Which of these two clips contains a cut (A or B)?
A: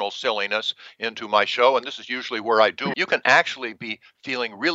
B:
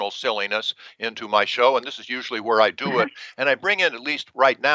A